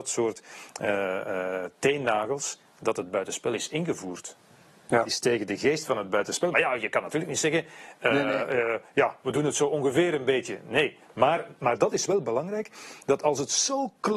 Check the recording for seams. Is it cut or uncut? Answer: uncut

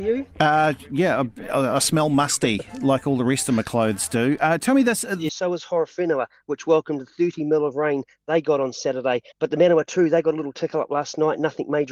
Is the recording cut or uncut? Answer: cut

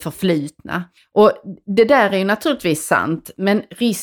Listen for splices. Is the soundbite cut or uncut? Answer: cut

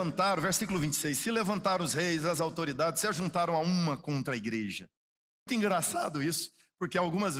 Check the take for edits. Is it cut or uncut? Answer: cut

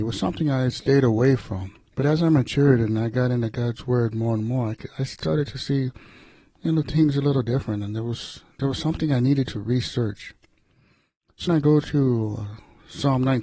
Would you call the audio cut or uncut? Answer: cut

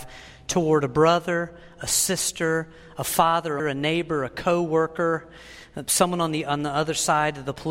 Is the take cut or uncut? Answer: cut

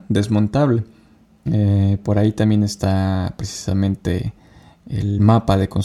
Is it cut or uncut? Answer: cut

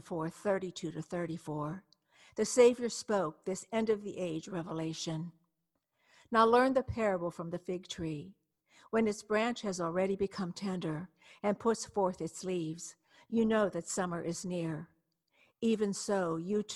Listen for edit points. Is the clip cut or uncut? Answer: uncut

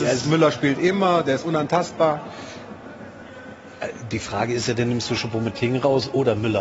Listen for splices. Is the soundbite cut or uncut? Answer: uncut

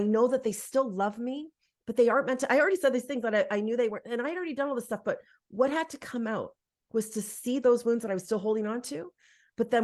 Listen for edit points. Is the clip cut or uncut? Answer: uncut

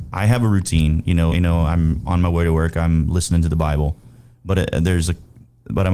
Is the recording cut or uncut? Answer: cut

